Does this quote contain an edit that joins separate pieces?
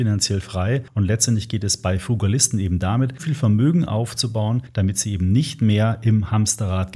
yes; 1 cut; at 3.2 s

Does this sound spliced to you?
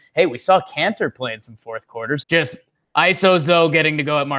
yes; 1 cut; at 2.2 s

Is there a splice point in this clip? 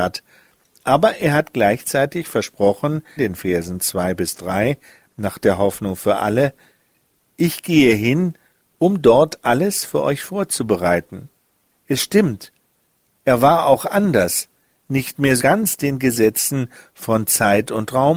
yes; 3 cuts; at 3.2 s, 11.7 s, 15.4 s

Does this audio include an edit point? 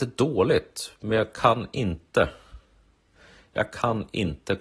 no; 0 cuts

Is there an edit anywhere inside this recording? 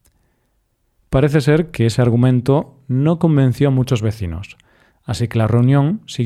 yes; 1 cut; at 1.0 s

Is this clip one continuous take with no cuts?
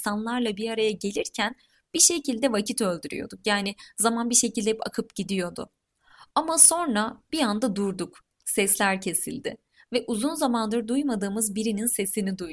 yes; 0 cuts

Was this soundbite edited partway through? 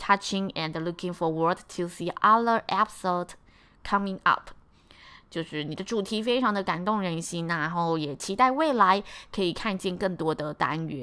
no; 0 cuts

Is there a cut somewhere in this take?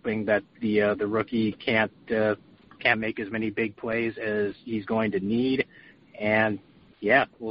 no; 0 cuts

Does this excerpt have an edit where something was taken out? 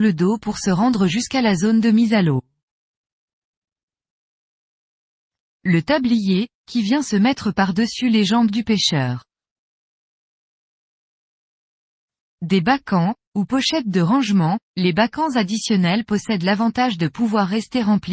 yes; 2 cuts; at 6.5 s, 14.6 s

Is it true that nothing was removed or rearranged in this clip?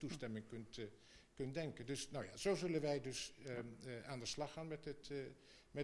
yes; 0 cuts

